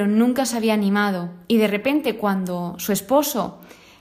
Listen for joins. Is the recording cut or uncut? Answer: uncut